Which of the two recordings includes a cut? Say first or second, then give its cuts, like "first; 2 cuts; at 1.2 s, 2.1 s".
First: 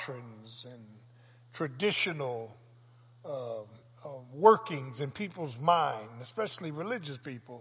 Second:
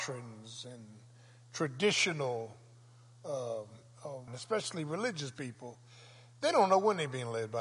second; 1 cut; at 4.3 s